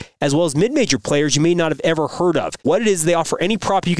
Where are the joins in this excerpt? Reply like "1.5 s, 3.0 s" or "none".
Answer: 2.6 s